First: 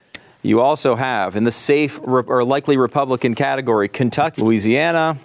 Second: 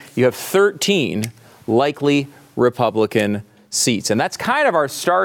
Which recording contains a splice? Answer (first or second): first